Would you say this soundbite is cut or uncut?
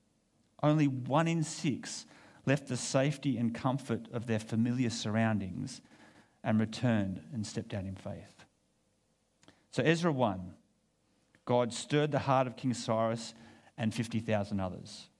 uncut